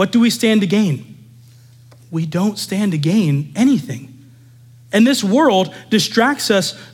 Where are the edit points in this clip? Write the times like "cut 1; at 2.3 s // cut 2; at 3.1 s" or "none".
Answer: none